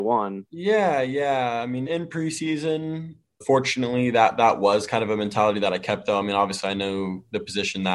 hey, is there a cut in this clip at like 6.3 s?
no; 2 cuts; at 1.9 s, 3.4 s

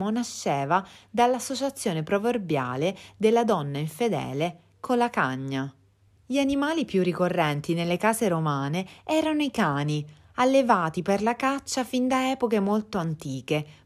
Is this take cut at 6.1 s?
yes; 1 cut; at 6.1 s

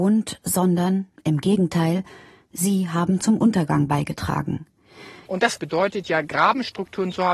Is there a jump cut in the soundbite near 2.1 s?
no; 1 cut; at 5.3 s

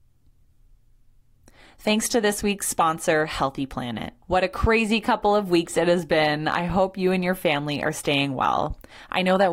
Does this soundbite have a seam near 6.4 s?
no; 1 cut; at 4.2 s

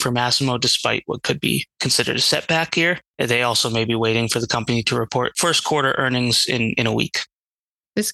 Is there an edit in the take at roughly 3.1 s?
yes; 1 cut; at 3.1 s

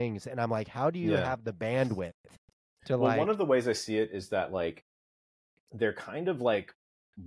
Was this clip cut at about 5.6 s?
no; 0 cuts

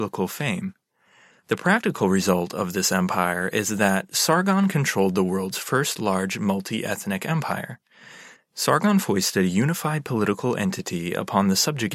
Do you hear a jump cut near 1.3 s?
yes; 2 cuts; at 1.3 s, 8.4 s

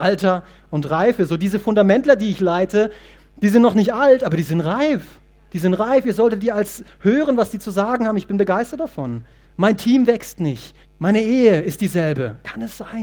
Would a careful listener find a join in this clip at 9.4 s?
yes; 2 cuts; at 9.4 s, 10.8 s

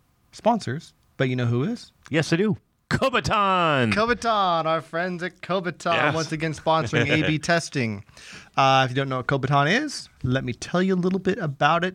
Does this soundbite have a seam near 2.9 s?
yes; 1 cut; at 2.9 s

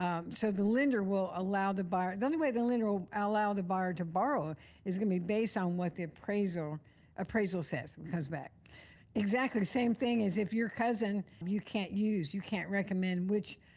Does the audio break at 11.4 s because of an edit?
yes; 2 cuts; at 9.0 s, 11.4 s

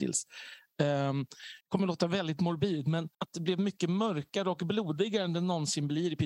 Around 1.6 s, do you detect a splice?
yes; 2 cuts; at 1.6 s, 3.1 s

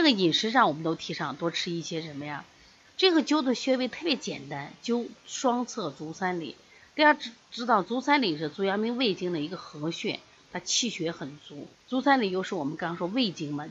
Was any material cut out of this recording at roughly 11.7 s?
yes; 2 cuts; at 2.8 s, 11.7 s

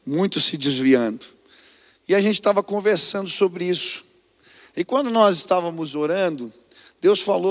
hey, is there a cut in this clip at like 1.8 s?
no; 0 cuts

